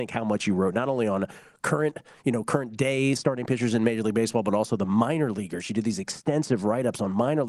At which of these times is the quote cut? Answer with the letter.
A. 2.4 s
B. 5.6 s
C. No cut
C